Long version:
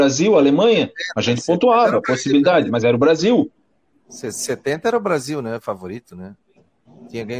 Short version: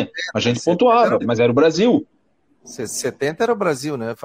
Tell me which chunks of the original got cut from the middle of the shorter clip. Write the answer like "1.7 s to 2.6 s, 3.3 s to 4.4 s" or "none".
2.0 s to 2.6 s